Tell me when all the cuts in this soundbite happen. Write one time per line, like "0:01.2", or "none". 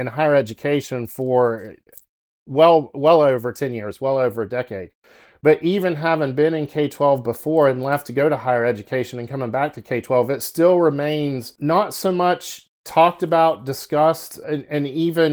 0:14.4